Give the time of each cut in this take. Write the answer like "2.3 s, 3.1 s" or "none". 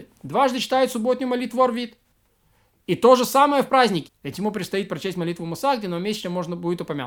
4.1 s